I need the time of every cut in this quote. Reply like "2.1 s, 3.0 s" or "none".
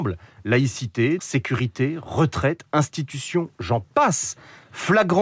1.2 s